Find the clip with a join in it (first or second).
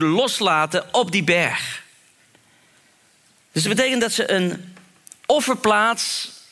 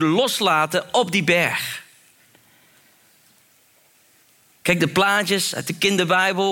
first